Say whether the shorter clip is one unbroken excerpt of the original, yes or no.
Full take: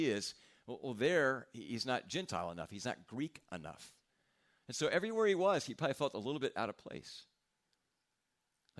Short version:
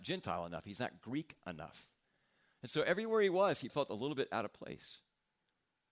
no